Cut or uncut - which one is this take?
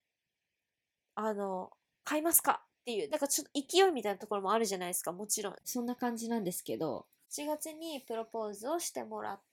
cut